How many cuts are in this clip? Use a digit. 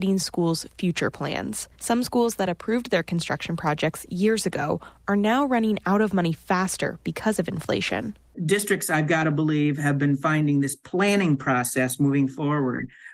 1